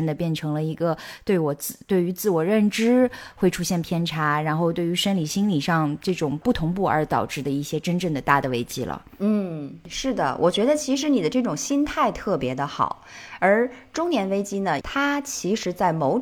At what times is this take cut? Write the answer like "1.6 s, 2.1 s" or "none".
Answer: 14.8 s